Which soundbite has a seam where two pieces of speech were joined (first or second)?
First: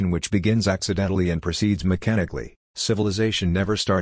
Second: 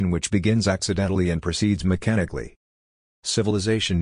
first